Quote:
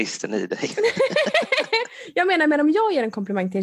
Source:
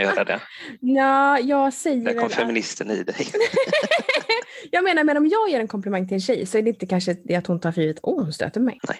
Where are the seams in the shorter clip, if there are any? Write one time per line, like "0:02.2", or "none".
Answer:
none